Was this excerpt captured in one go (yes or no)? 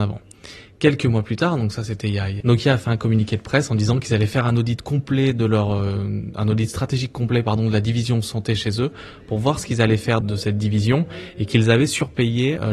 no